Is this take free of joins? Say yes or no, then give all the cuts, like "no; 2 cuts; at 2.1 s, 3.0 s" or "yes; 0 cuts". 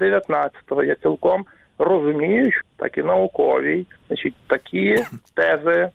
no; 2 cuts; at 2.6 s, 4.0 s